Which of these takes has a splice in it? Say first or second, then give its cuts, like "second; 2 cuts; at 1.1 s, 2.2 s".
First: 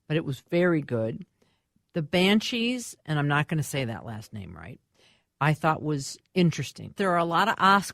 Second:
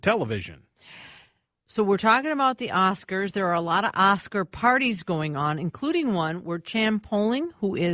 first; 2 cuts; at 1.8 s, 7.0 s